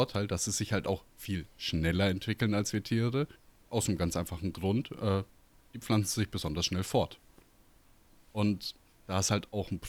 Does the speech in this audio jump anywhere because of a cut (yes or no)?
no